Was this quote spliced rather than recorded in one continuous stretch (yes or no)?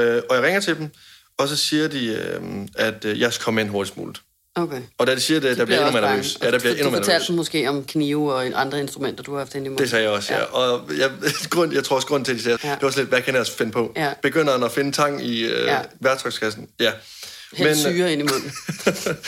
yes